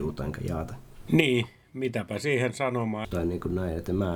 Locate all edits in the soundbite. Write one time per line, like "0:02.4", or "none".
0:03.0